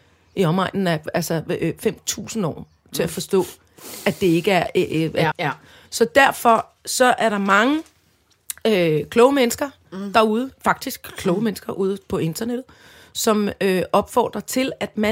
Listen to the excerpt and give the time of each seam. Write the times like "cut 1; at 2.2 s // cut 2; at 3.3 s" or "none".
cut 1; at 5.3 s